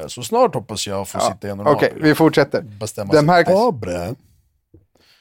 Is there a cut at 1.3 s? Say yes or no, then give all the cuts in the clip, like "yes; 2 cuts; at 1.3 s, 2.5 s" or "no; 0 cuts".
no; 1 cut; at 3.5 s